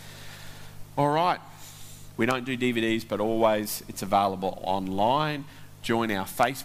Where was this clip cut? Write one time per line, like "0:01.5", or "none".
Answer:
0:02.1